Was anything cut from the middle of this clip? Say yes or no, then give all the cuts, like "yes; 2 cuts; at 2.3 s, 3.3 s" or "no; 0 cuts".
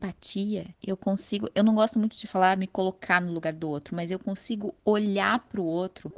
no; 0 cuts